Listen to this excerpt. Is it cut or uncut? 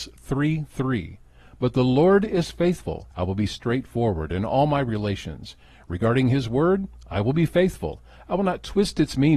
cut